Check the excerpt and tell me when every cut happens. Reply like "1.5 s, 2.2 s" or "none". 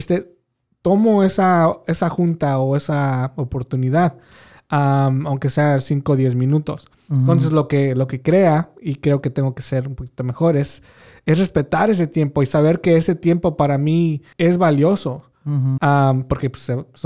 14.3 s, 15.8 s